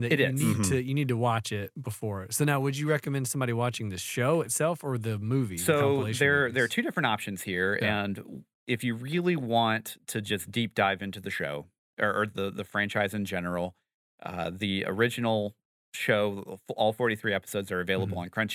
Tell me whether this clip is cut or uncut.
uncut